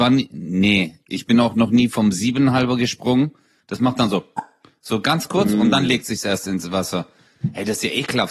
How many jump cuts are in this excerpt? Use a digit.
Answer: 1